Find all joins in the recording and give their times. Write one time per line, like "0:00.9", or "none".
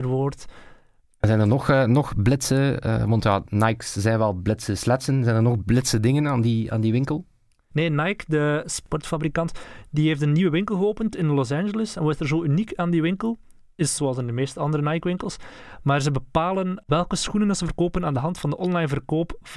0:07.7
0:14.0